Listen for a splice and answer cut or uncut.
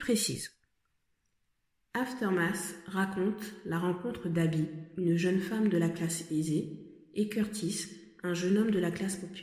uncut